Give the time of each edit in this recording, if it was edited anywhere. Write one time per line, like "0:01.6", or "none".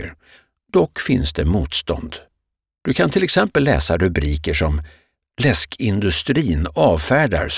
none